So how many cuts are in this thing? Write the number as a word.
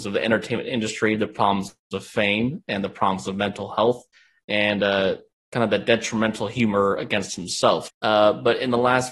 one